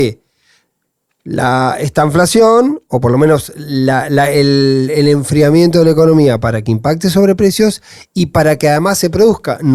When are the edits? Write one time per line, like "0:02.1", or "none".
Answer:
none